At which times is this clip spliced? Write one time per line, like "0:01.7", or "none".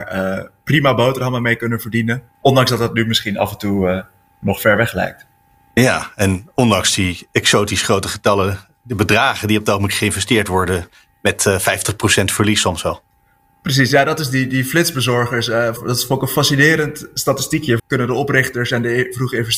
0:02.3
0:15.8
0:17.8